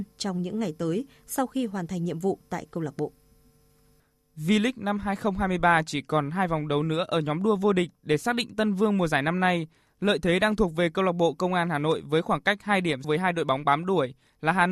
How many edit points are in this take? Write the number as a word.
one